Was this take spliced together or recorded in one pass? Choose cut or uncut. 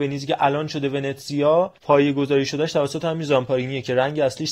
cut